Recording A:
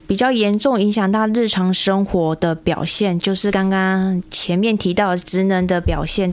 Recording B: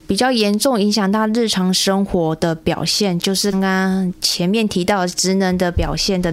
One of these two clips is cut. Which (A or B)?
B